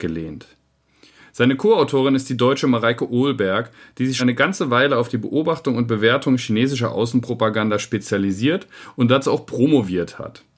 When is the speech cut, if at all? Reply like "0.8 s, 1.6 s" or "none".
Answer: 4.2 s